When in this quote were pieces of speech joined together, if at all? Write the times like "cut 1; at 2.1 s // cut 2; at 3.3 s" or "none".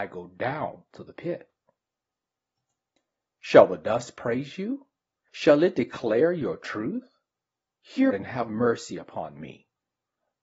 cut 1; at 8.1 s